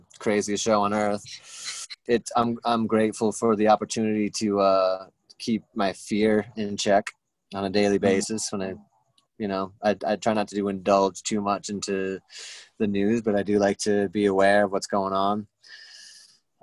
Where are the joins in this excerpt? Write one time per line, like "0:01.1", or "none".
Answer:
0:02.1
0:10.0